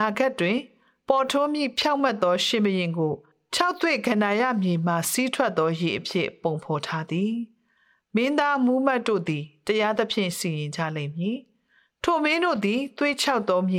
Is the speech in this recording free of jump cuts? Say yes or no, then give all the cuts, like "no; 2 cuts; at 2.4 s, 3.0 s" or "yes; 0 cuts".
yes; 0 cuts